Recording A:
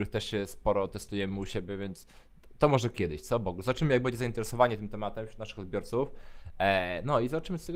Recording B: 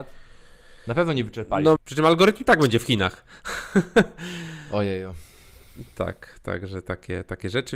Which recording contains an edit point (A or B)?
B